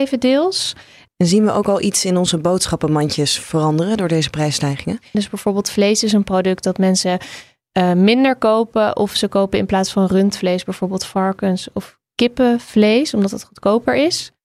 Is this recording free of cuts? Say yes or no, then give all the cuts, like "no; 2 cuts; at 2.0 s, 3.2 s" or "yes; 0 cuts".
no; 2 cuts; at 1.1 s, 5.1 s